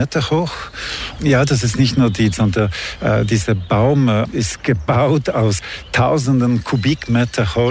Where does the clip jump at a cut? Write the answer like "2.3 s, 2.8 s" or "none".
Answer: 1.2 s, 2.3 s